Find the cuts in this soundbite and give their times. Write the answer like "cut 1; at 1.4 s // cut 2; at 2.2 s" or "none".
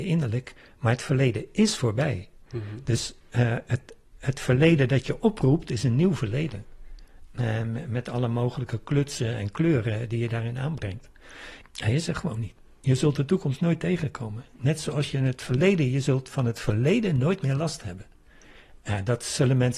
cut 1; at 11.6 s